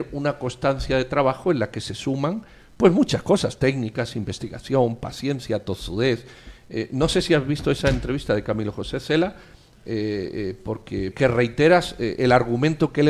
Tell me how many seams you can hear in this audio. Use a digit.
1